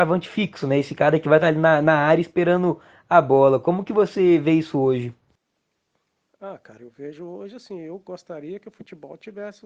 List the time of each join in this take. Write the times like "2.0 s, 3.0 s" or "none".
none